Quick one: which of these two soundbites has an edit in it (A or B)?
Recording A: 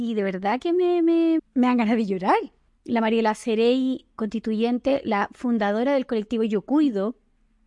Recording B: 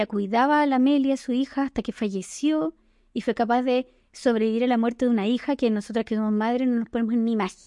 A